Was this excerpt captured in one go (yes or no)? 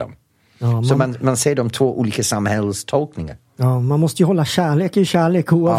yes